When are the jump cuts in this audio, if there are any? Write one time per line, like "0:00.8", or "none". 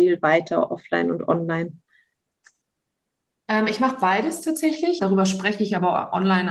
0:05.0